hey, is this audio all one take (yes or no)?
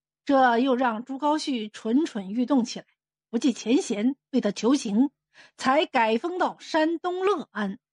no